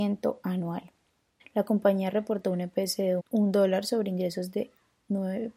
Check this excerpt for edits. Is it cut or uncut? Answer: cut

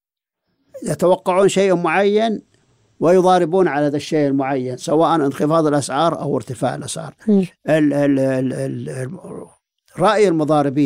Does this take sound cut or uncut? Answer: uncut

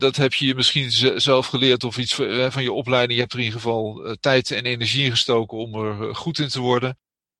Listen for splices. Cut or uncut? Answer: uncut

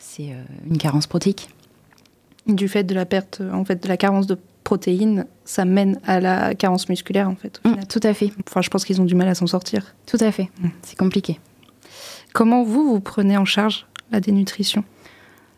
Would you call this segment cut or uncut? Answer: cut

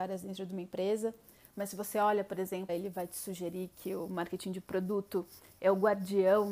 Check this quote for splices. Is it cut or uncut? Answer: cut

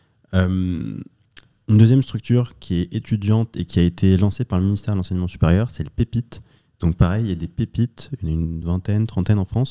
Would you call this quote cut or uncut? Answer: uncut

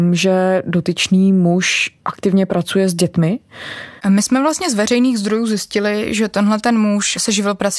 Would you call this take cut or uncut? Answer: cut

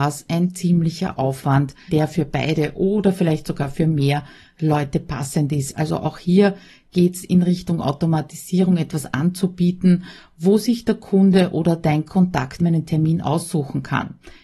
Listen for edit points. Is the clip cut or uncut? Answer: cut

